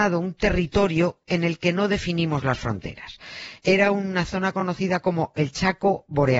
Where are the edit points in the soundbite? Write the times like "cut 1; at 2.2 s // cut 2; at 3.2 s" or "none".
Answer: none